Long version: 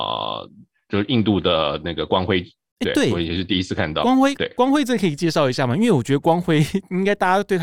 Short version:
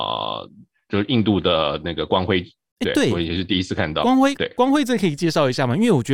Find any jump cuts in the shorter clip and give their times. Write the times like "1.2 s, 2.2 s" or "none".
none